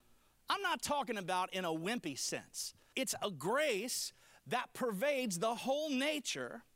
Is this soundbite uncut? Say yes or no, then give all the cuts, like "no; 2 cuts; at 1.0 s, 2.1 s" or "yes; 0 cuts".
no; 1 cut; at 2.9 s